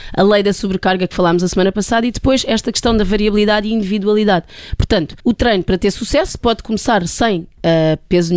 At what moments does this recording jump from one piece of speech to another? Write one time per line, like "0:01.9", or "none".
0:05.2